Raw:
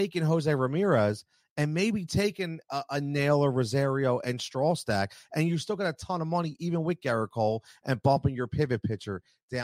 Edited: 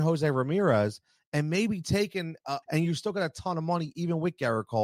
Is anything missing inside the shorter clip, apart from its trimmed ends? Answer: yes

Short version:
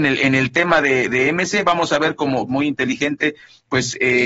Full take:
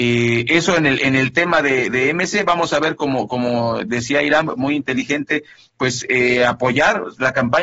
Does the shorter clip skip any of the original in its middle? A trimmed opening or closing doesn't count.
yes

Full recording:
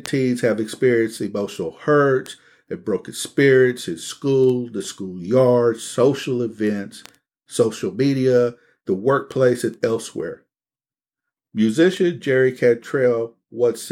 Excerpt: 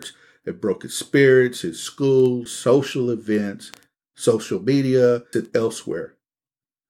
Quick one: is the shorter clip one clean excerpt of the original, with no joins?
no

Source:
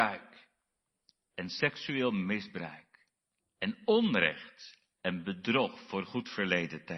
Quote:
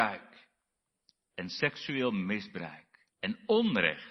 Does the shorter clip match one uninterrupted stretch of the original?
no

